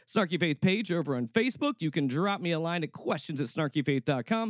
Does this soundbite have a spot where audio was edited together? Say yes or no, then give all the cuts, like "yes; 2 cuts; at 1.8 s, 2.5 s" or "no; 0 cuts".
no; 0 cuts